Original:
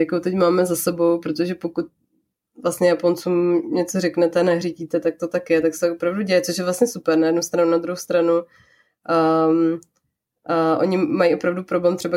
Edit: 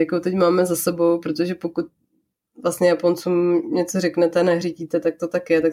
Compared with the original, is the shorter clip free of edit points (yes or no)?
yes